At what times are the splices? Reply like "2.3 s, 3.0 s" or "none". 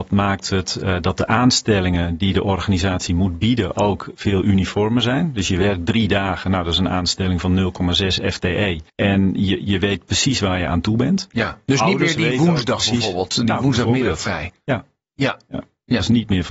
8.9 s